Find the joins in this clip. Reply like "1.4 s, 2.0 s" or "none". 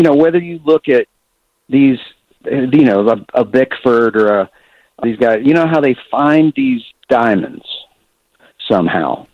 5.0 s